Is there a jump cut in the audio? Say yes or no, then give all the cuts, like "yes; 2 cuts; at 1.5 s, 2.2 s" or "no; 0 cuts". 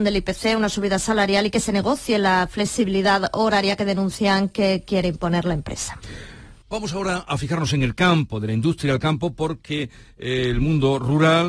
yes; 1 cut; at 6.6 s